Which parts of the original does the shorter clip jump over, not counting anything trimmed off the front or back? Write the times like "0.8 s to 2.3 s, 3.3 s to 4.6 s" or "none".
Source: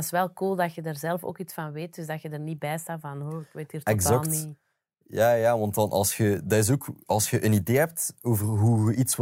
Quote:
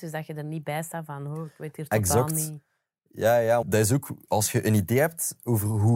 5.6 s to 6.4 s